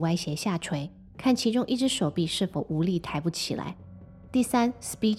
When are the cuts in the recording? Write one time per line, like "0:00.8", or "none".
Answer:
0:01.1